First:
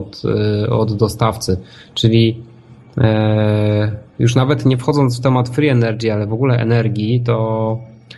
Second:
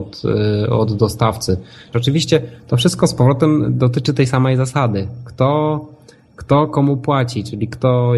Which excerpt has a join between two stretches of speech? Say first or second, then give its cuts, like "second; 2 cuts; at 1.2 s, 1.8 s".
second; 1 cut; at 1.9 s